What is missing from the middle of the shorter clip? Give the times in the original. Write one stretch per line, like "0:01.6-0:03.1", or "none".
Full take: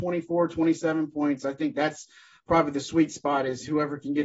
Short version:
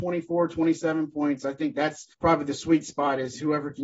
0:02.1-0:02.4